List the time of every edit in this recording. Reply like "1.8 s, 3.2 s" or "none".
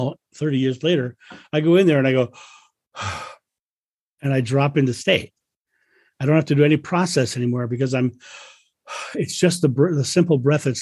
none

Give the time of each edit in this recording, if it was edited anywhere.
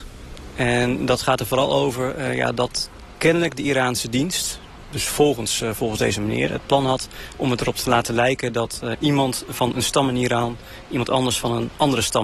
8.9 s

